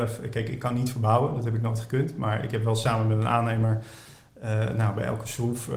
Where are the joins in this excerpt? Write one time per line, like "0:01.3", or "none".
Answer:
none